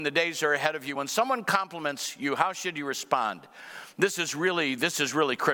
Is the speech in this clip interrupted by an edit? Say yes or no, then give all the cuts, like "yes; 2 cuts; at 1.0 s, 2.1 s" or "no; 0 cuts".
no; 0 cuts